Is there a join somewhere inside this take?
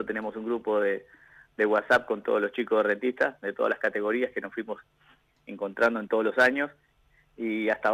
no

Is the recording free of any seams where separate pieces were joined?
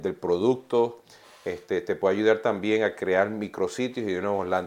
yes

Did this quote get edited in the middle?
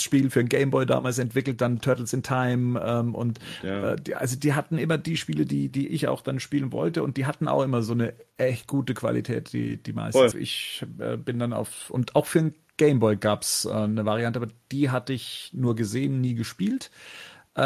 yes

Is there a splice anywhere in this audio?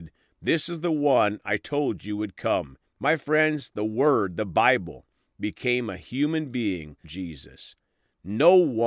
yes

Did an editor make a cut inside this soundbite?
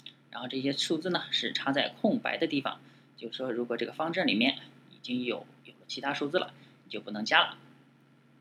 no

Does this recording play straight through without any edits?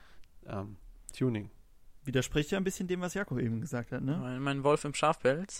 yes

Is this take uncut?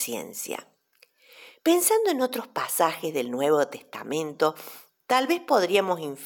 yes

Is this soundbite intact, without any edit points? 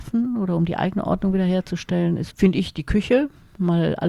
no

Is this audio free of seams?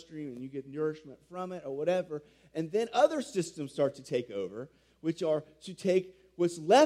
yes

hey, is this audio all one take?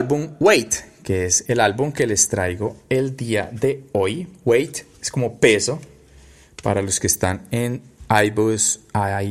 yes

